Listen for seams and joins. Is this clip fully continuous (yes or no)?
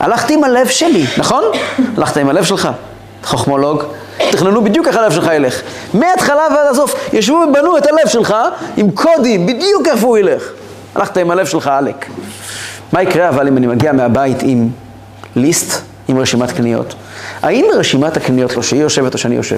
no